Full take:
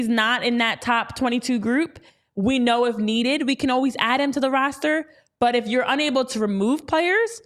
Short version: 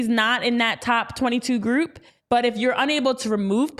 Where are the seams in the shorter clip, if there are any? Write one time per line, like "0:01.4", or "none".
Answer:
0:02.2